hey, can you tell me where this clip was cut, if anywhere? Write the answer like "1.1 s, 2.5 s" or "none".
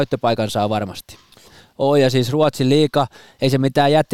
1.4 s